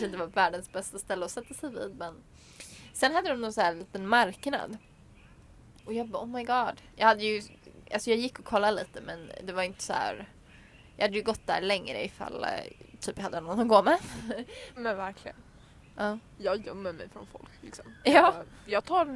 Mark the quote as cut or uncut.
cut